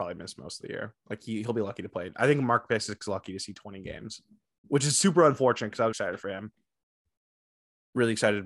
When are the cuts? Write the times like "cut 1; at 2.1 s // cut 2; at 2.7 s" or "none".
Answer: cut 1; at 4.6 s // cut 2; at 5.9 s

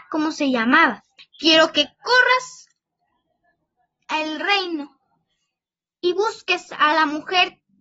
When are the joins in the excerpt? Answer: cut 1; at 1.2 s

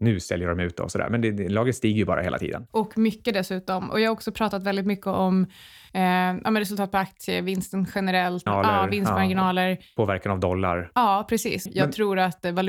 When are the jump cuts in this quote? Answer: cut 1; at 8.5 s // cut 2; at 11.7 s

